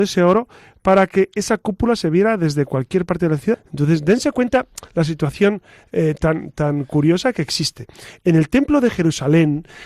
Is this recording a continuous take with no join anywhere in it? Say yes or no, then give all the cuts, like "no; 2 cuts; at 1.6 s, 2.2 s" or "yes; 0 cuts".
no; 1 cut; at 3.5 s